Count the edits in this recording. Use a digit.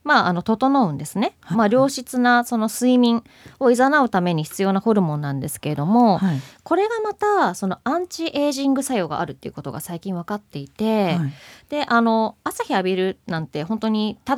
1